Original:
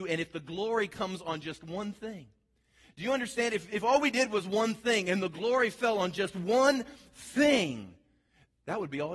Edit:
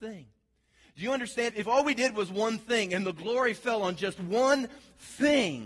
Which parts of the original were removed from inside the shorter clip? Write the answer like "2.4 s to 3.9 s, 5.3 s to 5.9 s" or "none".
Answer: 3.5 s to 3.7 s